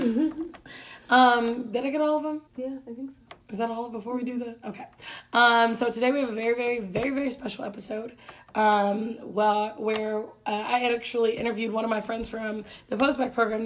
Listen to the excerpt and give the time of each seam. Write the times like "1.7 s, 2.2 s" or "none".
2.5 s